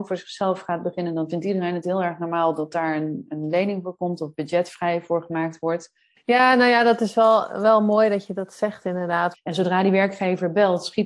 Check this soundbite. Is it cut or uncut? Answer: cut